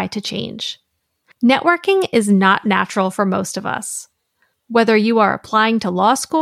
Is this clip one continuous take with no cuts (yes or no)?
yes